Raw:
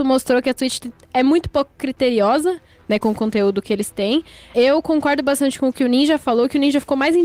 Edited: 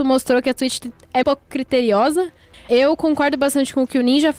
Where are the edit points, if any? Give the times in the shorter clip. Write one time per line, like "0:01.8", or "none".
0:01.2
0:02.5